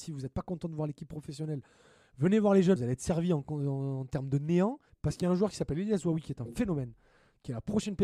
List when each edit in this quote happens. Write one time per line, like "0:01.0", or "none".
0:02.8
0:04.9